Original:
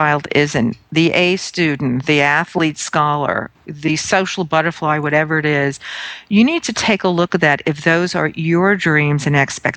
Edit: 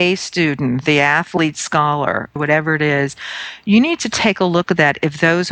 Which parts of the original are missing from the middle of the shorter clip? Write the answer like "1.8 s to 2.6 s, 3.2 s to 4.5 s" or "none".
3.6 s to 5.0 s